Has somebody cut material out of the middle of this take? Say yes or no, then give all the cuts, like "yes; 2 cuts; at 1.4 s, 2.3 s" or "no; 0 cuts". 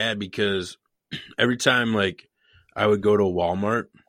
no; 0 cuts